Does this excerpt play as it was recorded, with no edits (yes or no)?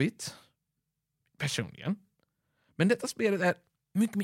yes